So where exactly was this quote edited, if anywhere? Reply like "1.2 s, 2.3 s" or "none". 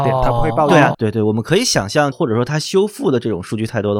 0.9 s, 2.1 s